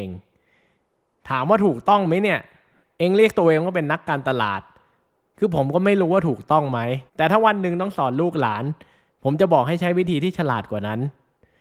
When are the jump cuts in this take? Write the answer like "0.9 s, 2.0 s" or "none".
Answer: 7.1 s